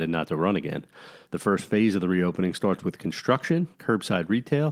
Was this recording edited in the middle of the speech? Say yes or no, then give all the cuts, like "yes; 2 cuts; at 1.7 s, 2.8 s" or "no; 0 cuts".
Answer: yes; 2 cuts; at 1.2 s, 3.7 s